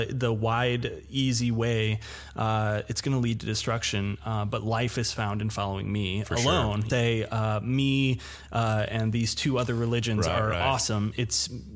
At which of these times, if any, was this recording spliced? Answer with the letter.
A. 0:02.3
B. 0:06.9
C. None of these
B